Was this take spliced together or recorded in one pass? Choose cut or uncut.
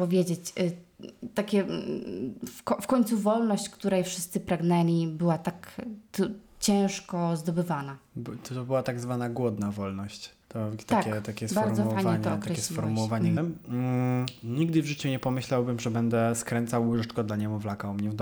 cut